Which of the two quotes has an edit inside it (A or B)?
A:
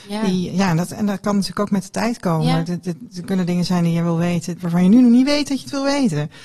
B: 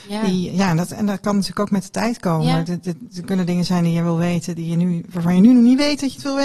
A